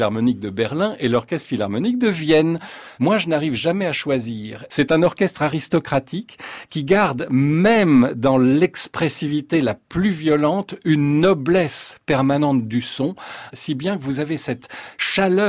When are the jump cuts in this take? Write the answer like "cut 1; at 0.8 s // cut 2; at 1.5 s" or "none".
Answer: cut 1; at 3.0 s // cut 2; at 4.7 s // cut 3; at 13.5 s